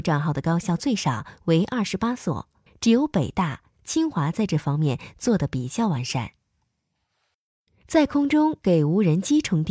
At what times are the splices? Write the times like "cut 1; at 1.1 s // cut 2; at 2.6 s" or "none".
cut 1; at 2.7 s